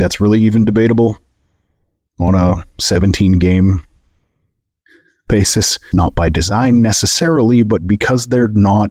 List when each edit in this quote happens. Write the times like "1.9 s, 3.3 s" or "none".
5.9 s